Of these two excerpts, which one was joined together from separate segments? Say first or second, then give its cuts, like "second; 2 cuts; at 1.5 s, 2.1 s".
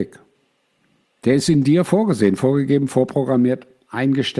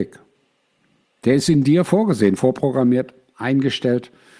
second; 1 cut; at 2.4 s